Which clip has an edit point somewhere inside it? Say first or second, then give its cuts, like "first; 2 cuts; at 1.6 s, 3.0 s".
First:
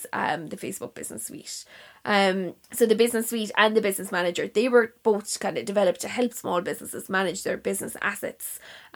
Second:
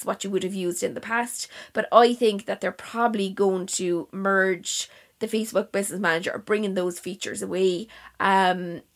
first; 1 cut; at 2.6 s